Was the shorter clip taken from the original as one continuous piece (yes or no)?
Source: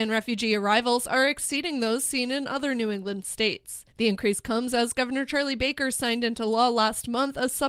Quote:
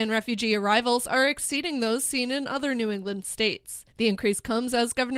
yes